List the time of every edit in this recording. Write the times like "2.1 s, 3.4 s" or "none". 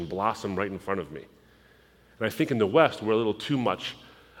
none